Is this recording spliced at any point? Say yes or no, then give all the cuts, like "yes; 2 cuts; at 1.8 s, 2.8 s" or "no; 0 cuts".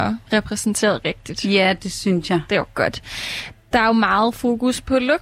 no; 0 cuts